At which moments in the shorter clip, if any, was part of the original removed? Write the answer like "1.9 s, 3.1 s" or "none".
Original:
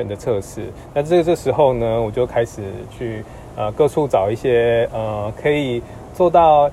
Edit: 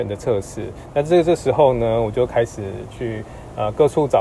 none